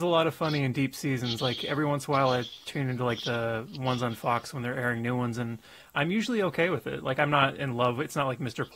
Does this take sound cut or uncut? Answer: uncut